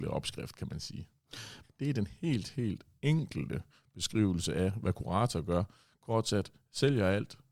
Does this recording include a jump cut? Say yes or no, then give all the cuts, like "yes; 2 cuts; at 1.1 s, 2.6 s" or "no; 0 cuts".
yes; 1 cut; at 1.6 s